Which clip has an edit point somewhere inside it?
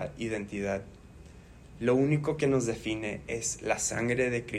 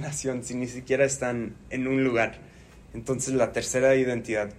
second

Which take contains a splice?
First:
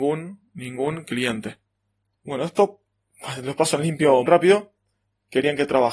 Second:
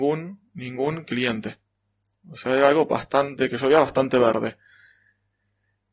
first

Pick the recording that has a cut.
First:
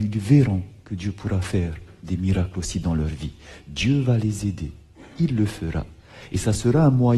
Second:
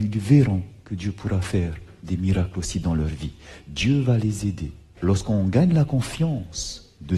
second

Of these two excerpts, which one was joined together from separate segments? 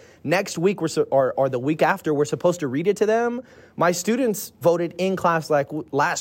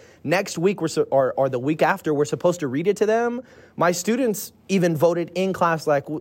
first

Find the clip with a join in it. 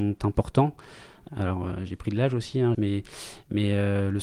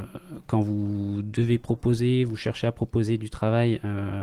first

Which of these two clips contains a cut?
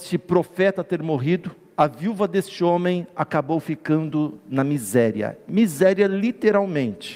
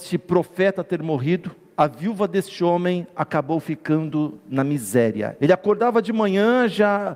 second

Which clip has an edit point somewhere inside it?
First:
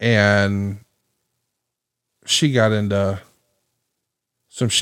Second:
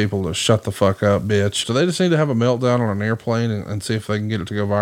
second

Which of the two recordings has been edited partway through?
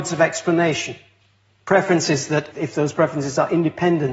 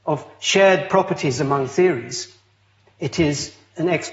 first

